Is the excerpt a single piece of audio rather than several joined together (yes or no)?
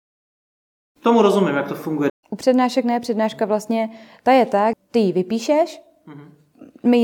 no